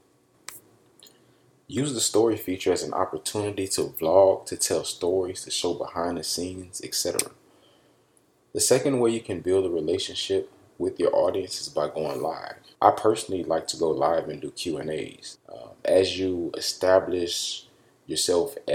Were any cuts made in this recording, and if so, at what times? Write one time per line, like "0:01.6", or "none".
0:12.7
0:15.3